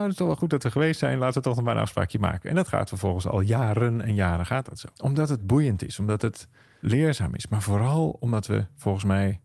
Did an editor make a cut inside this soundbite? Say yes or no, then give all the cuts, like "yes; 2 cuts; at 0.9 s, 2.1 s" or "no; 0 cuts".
yes; 2 cuts; at 4.9 s, 6.8 s